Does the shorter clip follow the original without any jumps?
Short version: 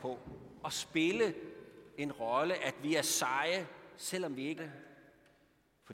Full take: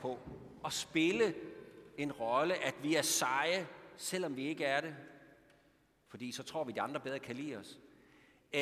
no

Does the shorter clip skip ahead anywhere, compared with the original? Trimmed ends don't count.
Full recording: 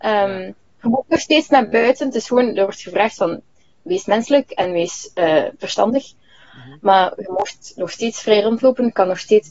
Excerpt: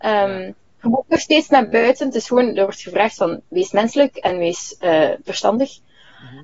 yes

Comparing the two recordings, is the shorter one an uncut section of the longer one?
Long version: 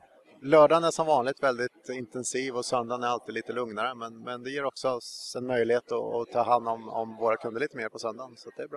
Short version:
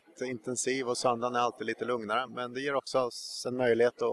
no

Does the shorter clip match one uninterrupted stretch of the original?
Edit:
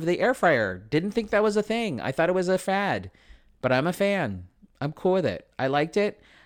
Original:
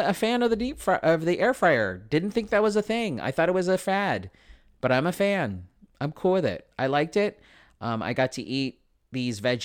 yes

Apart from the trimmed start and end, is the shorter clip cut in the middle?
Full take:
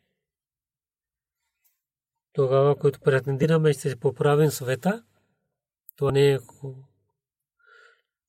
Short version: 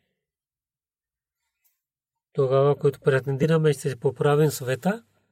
no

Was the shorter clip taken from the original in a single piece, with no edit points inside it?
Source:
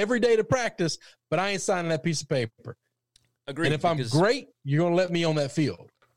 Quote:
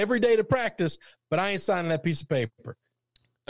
yes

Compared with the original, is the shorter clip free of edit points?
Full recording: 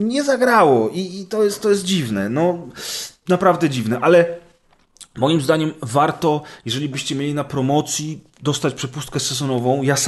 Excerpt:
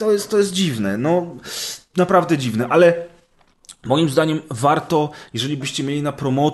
yes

